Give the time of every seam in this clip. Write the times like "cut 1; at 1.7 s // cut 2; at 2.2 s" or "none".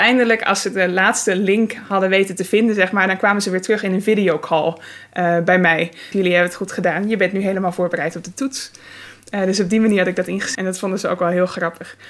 cut 1; at 6.1 s // cut 2; at 10.6 s